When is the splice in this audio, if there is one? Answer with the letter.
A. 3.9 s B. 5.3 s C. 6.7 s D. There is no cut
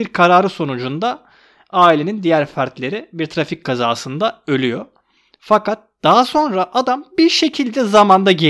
D